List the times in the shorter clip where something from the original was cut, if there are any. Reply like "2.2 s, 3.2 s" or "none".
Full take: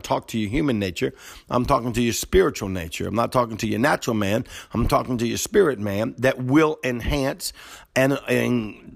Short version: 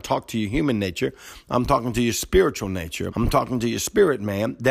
3.1 s